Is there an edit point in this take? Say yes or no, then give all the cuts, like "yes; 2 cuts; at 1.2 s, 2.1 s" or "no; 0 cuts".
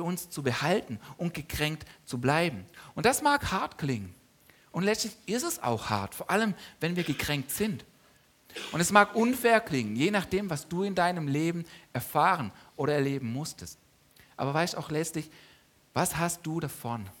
no; 0 cuts